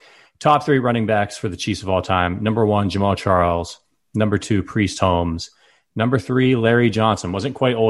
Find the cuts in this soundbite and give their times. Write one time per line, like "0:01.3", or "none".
none